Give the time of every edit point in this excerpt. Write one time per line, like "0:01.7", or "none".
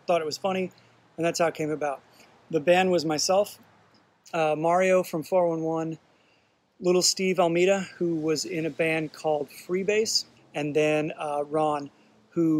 0:10.4